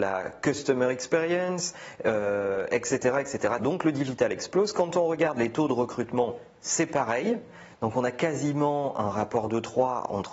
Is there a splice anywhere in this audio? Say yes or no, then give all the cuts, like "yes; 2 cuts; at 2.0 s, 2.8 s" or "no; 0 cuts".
yes; 2 cuts; at 3.6 s, 7.7 s